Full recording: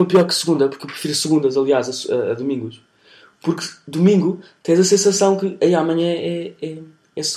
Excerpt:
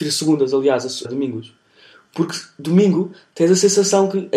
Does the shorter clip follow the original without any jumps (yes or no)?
no